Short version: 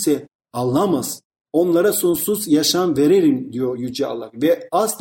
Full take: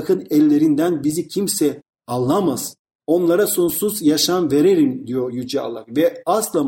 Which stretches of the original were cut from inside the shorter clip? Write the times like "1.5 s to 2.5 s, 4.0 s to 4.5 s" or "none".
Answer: none